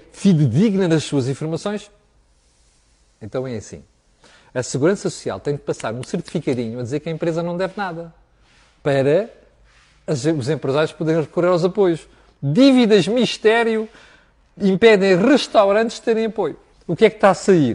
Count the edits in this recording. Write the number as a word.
two